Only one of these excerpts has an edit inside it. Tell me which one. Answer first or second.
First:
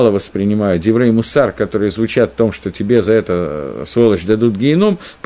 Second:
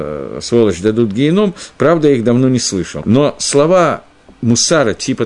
second